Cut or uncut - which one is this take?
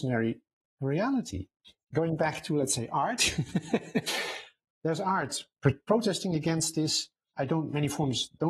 cut